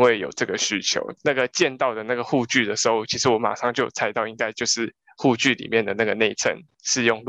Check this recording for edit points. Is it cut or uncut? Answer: cut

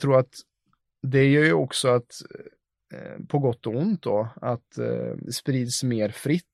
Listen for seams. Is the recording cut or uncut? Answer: cut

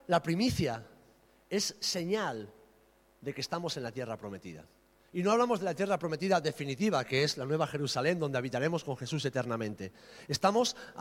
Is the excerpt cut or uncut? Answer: uncut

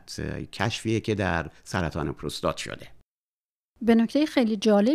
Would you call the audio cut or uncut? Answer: uncut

